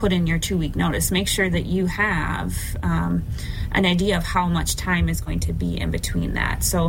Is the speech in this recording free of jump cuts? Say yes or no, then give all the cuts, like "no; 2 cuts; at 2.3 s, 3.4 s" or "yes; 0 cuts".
yes; 0 cuts